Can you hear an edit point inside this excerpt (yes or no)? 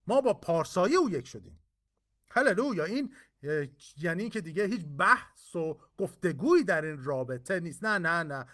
no